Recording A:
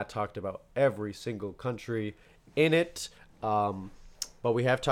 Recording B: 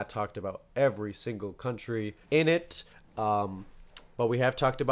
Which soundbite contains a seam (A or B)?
B